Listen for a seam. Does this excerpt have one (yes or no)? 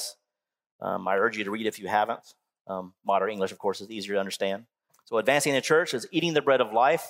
yes